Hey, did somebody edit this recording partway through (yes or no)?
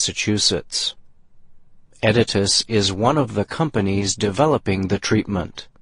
no